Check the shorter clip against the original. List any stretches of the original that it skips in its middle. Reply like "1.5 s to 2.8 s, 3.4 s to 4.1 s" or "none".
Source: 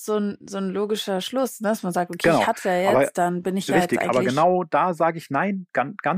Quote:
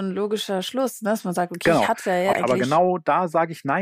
2.9 s to 4.0 s